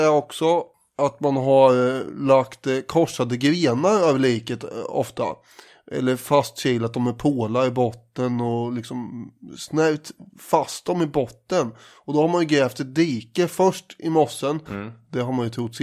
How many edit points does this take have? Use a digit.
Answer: 1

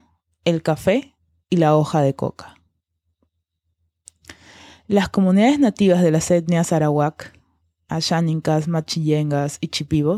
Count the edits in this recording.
0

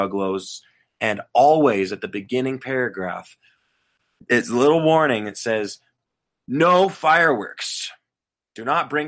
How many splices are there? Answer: 0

